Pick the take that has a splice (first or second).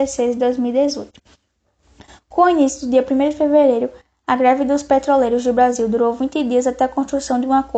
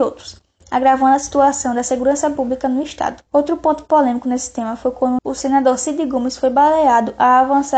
second